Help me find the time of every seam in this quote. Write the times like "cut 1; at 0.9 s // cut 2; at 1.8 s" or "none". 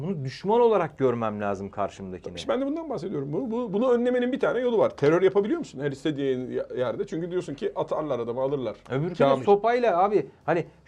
none